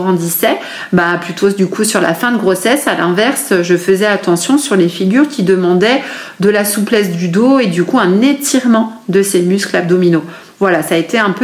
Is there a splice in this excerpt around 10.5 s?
no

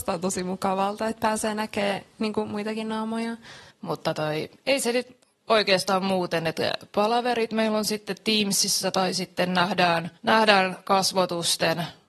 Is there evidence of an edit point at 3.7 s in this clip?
yes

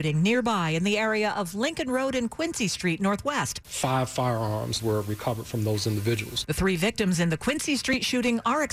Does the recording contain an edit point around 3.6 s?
yes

